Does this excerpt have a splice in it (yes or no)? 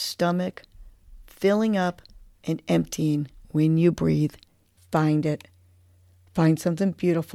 yes